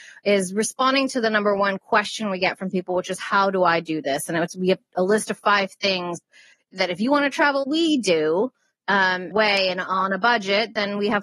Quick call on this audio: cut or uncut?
cut